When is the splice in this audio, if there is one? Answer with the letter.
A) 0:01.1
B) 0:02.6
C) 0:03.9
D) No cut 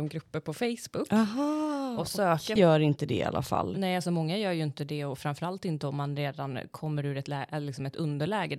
B